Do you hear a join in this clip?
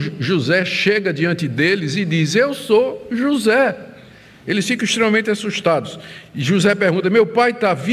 no; 0 cuts

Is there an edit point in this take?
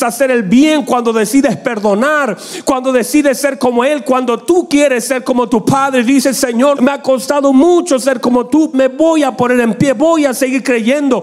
yes; 2 cuts; at 6.8 s, 8.7 s

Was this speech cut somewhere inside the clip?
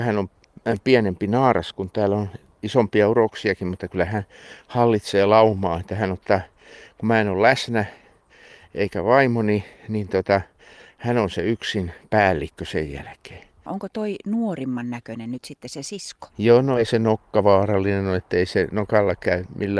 yes; 2 cuts; at 13.7 s, 16.3 s

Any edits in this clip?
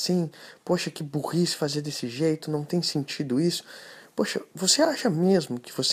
no; 0 cuts

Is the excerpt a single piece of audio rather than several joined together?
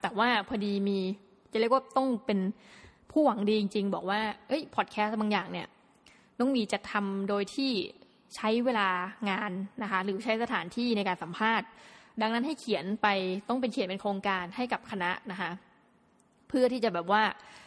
yes; 0 cuts

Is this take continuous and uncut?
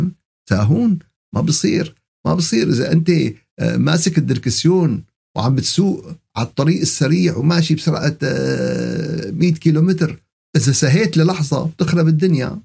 yes; 0 cuts

